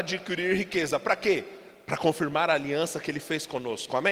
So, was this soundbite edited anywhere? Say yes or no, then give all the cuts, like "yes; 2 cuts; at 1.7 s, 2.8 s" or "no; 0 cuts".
no; 0 cuts